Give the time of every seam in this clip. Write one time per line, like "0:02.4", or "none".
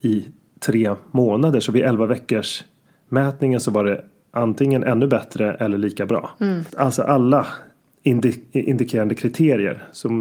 0:06.7

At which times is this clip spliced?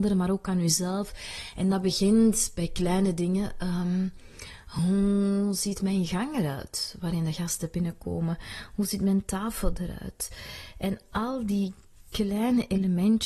none

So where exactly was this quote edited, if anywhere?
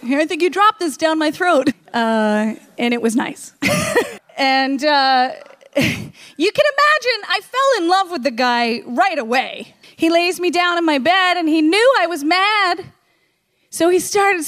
0:01.7
0:04.2
0:09.8

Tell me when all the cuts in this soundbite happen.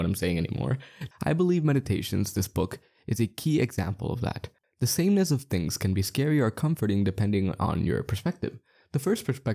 0:01.1
0:04.6

